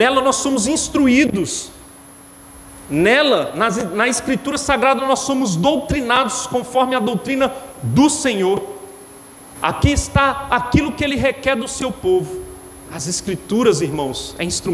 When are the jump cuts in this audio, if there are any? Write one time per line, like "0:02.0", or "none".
0:09.6
0:12.9